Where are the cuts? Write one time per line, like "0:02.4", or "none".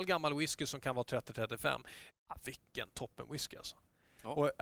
0:02.1

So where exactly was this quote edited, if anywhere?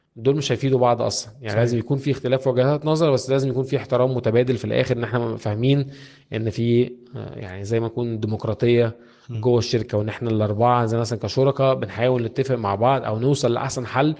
none

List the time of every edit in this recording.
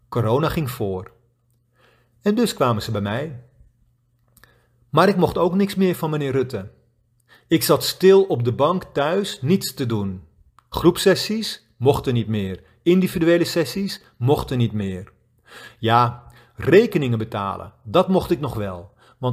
none

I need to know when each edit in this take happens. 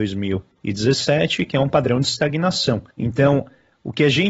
0:02.9

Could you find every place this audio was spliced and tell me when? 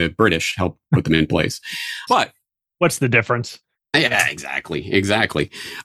0:02.1

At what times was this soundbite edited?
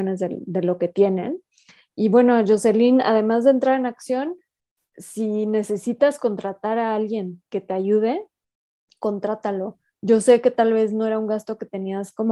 0:01.8
0:04.8

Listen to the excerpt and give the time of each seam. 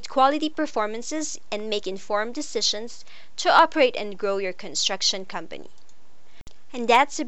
none

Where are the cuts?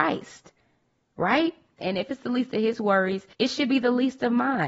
0:01.8
0:03.3

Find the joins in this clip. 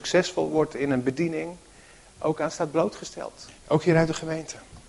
0:03.6

